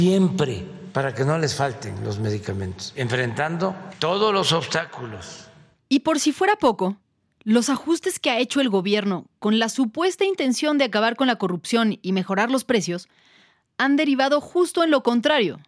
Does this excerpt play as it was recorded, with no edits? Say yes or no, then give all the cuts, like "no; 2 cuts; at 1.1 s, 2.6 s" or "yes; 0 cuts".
yes; 0 cuts